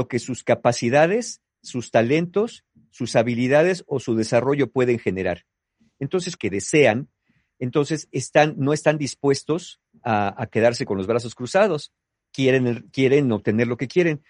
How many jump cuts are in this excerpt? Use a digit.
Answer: 1